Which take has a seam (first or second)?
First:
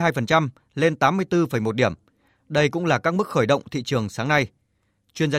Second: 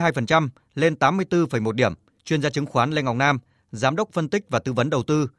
second